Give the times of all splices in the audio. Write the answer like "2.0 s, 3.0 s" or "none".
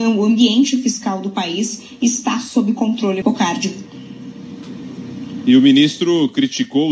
3.2 s

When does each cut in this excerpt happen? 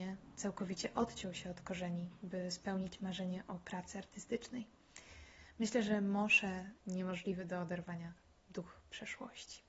6.8 s

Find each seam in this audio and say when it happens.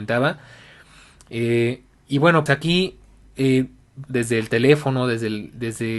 2.5 s, 4.1 s

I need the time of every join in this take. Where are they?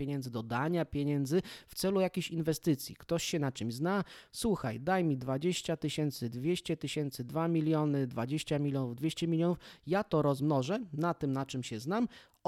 none

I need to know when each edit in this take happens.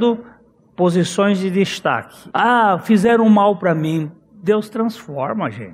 2.3 s

